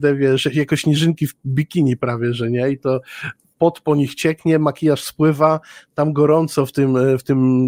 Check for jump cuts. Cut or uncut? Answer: uncut